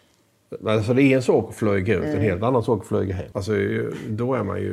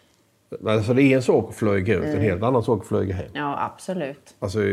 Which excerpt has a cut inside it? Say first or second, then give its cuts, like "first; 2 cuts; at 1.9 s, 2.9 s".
first; 1 cut; at 3.3 s